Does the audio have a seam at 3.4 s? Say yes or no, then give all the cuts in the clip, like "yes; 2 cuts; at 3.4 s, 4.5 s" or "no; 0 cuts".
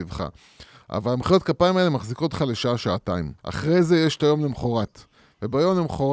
yes; 1 cut; at 3.4 s